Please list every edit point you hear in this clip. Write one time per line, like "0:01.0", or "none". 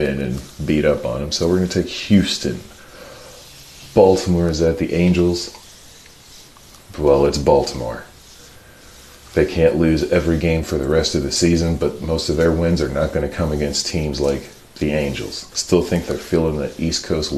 0:15.5